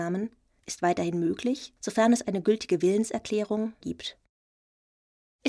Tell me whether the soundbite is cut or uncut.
cut